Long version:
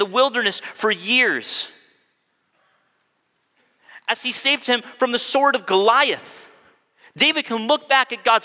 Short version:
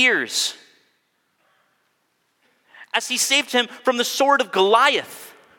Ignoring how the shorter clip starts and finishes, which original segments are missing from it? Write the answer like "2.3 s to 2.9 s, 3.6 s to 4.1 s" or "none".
none

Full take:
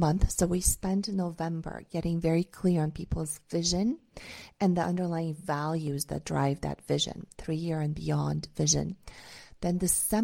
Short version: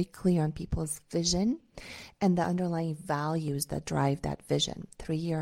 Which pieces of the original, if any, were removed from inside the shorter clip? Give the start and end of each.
none

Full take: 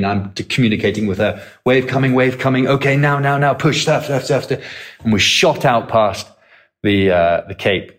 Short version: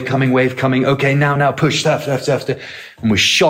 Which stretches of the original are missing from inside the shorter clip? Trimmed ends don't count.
3.2 s to 3.4 s

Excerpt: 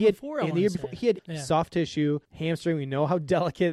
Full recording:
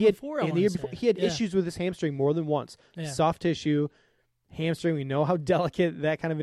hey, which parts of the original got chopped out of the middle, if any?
1.2 s to 2.9 s, 3.9 s to 4.4 s

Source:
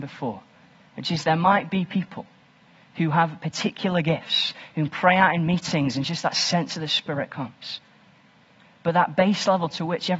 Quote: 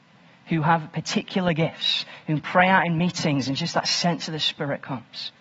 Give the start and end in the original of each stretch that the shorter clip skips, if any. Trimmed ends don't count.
none

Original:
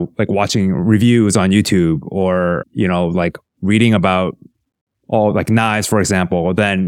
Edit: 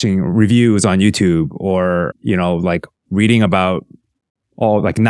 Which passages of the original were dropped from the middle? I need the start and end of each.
none

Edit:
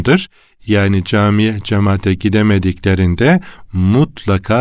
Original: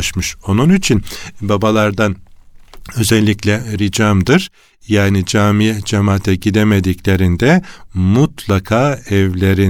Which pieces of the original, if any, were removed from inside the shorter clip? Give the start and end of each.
none

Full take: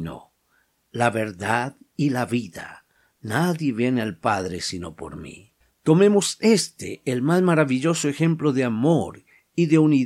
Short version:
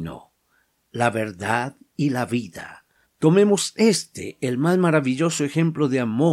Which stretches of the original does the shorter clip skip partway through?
3.0 s to 5.7 s

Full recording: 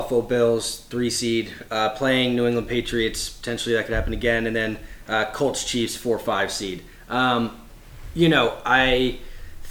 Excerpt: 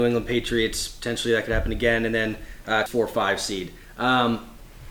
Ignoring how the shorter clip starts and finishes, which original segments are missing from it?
5.3 s to 6.0 s

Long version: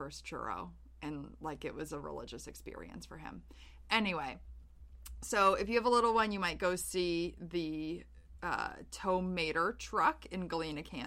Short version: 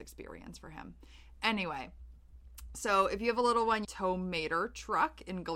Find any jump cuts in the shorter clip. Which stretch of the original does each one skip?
6.3 s to 8.9 s

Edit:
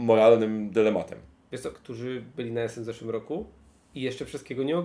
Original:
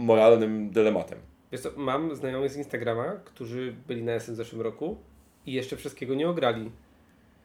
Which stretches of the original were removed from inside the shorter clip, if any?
1.7 s to 3.2 s

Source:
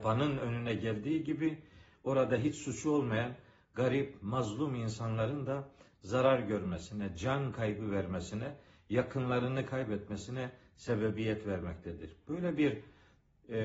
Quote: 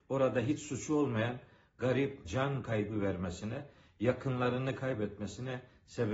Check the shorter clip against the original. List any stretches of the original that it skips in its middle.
4.2 s to 7.1 s

